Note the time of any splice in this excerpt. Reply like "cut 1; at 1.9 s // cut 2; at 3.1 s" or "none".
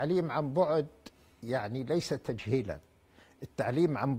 none